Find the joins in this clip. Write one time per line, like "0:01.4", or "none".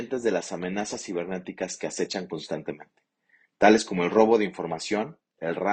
none

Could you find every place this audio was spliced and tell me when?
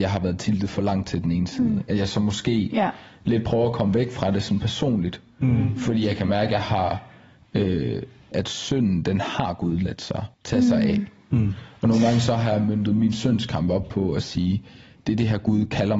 0:08.3
0:10.3

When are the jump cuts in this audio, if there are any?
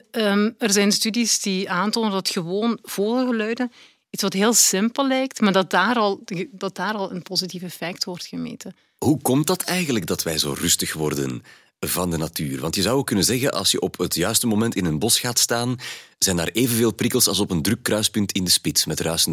0:09.0

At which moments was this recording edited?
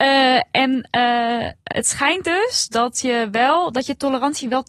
0:01.7

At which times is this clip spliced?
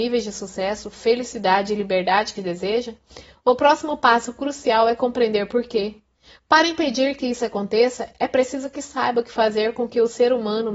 0:02.4

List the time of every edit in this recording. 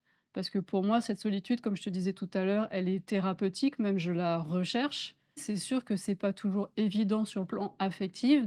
0:05.4

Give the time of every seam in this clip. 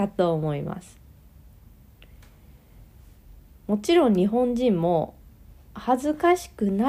none

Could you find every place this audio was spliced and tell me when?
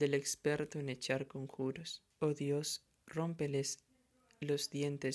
0:02.1

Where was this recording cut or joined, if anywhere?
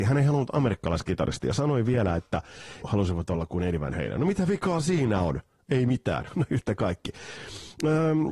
0:02.8

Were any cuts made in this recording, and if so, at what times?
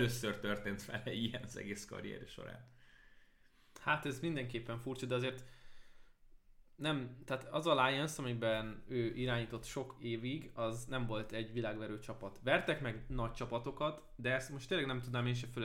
none

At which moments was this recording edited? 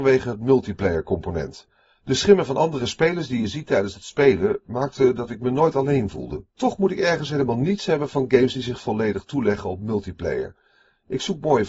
0:06.5

